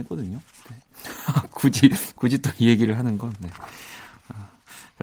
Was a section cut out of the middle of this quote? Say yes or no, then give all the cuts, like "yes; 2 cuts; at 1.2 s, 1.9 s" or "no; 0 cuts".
no; 0 cuts